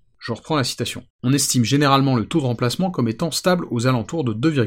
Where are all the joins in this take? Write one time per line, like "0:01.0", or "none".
0:01.1